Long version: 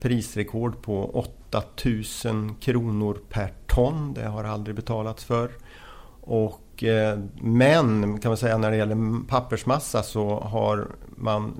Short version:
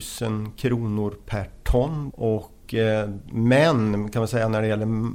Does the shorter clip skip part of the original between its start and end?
yes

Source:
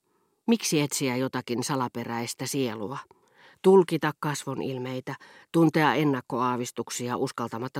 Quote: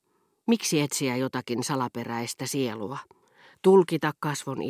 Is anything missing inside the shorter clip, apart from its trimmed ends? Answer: no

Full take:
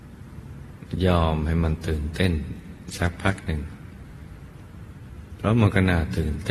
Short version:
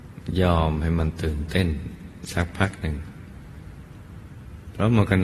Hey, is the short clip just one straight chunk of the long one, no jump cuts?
yes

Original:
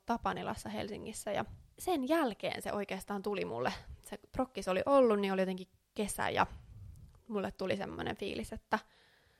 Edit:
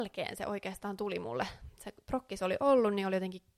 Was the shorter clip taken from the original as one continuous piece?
yes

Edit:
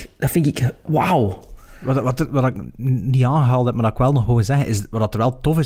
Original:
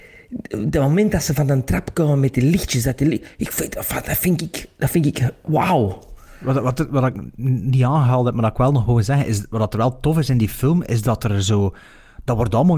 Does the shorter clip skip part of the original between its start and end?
no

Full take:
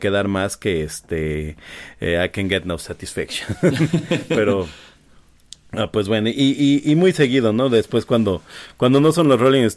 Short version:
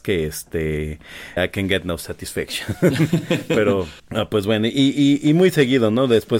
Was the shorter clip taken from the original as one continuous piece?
no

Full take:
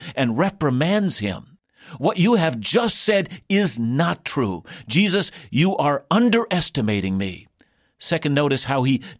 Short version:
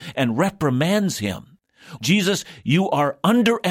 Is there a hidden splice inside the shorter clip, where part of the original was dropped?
yes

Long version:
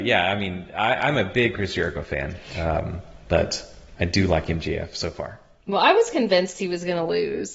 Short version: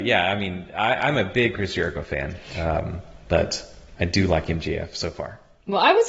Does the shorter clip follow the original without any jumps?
yes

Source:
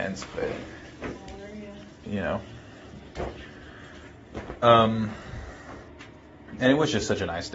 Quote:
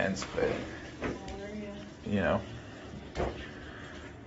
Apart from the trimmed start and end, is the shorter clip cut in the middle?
no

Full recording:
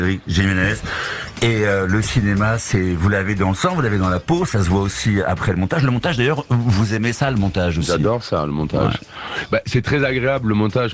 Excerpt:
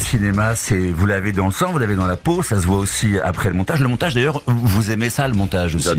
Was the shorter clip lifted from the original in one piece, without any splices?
yes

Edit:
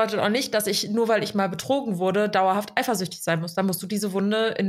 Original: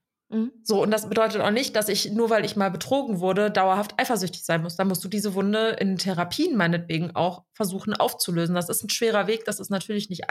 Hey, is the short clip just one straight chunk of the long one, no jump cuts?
yes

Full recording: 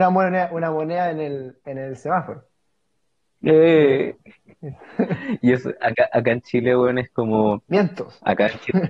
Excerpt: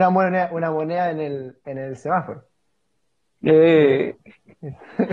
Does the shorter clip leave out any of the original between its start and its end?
no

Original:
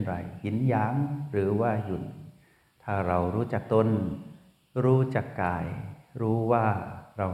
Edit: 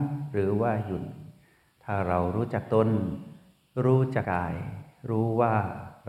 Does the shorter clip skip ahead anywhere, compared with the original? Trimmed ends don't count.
yes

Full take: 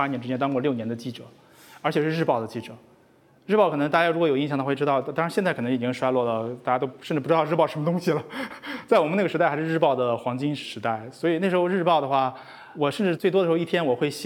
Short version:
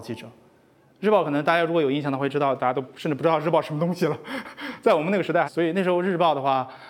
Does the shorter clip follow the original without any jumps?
no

